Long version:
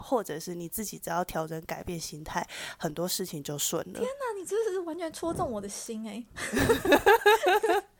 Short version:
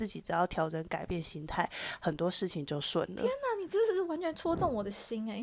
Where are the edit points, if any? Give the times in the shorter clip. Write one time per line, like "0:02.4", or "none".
none